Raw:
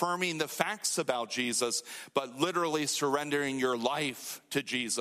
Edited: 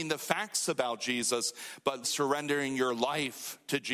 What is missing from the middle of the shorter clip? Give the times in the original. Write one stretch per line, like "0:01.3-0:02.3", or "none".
0:02.3-0:02.9